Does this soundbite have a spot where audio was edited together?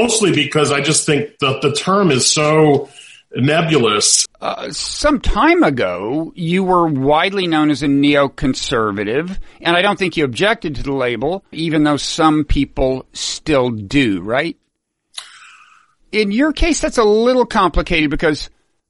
yes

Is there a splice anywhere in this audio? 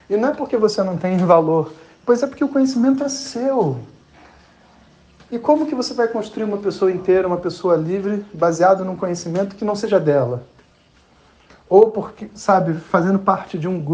no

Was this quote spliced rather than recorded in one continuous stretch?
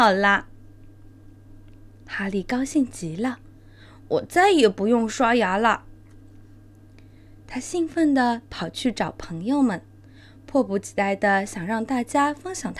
no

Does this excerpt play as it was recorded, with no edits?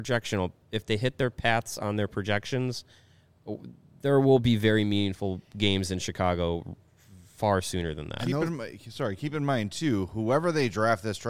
yes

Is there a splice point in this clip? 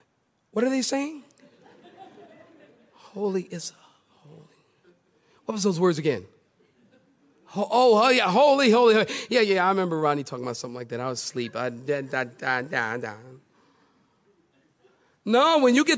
no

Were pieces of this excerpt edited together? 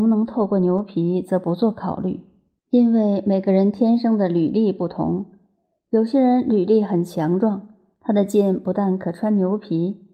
no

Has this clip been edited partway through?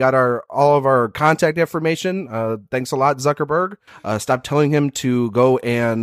yes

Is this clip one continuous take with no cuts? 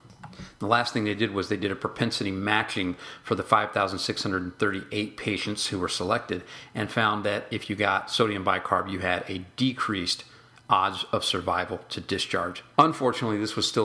no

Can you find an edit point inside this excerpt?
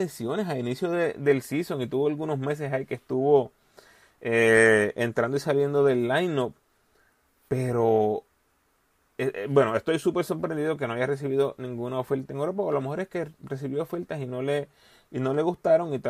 no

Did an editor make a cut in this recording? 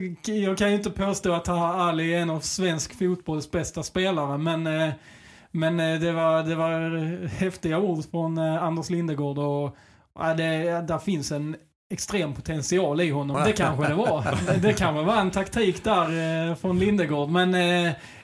yes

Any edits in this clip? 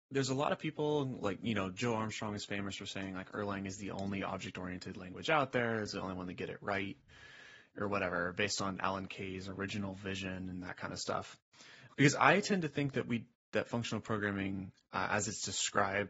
yes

